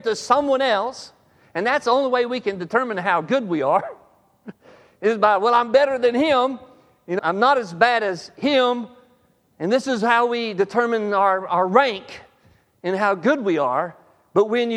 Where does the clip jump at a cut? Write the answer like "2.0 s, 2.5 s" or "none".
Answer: 7.2 s